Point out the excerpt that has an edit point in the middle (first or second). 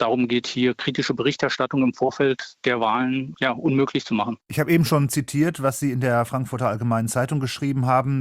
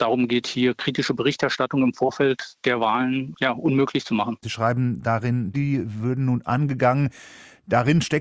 second